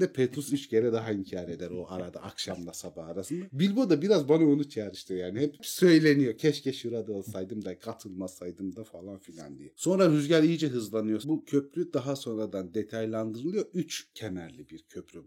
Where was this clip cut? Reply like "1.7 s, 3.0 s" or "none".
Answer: 11.2 s